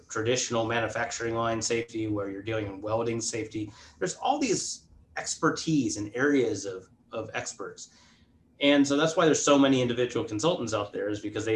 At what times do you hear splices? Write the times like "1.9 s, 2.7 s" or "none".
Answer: none